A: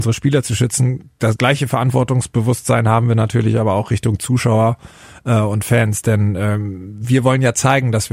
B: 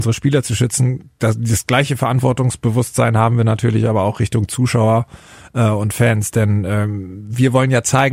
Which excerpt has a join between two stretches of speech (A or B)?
A